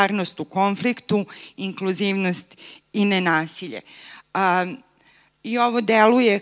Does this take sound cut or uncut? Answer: uncut